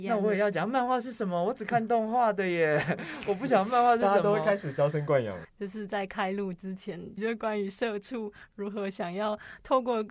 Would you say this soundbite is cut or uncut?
cut